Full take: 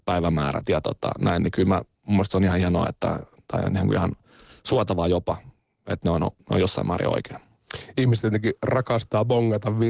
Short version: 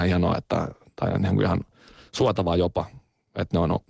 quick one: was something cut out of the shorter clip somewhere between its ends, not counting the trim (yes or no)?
no